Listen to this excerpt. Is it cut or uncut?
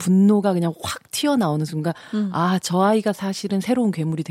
uncut